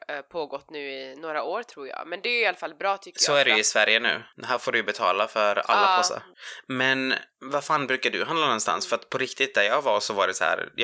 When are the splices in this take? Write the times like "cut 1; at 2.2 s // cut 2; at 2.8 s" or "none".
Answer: none